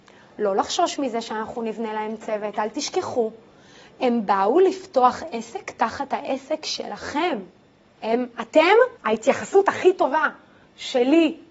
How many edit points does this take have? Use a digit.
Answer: 2